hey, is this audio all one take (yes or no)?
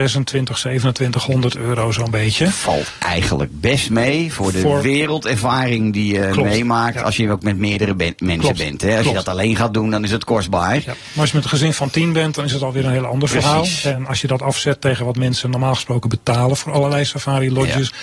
yes